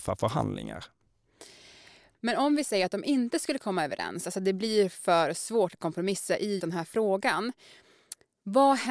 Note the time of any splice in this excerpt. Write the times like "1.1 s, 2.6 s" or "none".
6.6 s